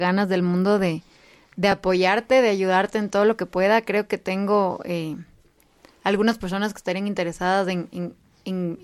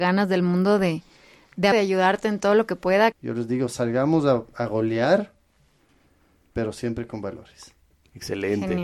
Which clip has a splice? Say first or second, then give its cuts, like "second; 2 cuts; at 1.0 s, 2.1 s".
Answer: second; 2 cuts; at 1.7 s, 3.1 s